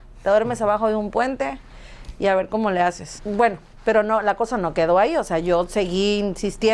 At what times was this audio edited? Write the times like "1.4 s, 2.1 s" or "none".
3.2 s

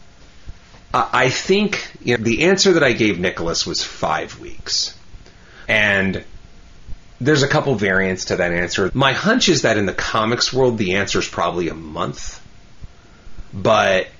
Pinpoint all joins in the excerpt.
2.2 s, 5.7 s, 8.9 s

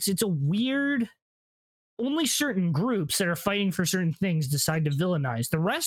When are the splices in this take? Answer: none

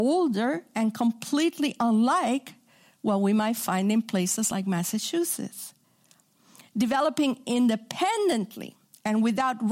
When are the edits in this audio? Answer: none

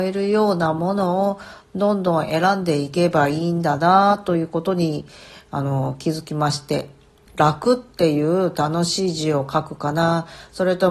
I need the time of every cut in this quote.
7.3 s

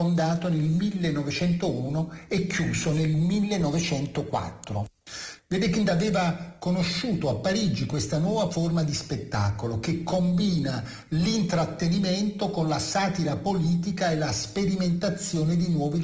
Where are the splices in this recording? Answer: 5.4 s

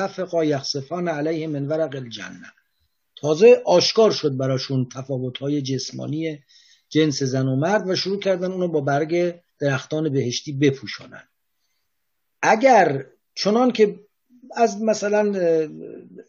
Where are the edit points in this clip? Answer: 9.5 s

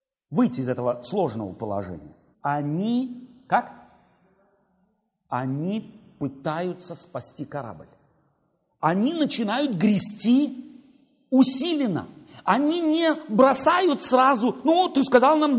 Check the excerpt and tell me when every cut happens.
2.3 s

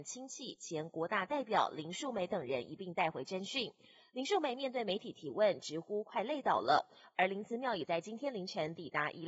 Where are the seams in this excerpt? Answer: none

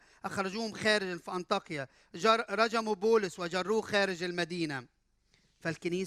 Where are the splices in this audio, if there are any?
none

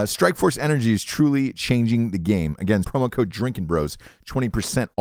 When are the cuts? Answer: 2.8 s

